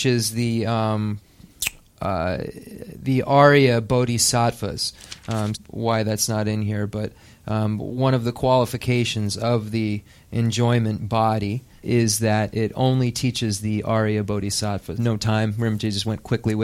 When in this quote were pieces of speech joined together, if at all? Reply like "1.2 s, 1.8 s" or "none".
5.5 s, 11.8 s, 14.9 s